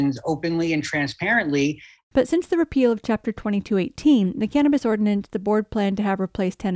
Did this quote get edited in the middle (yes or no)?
no